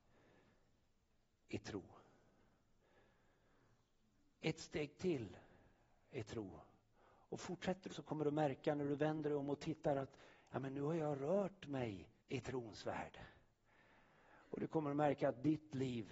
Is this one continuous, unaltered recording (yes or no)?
no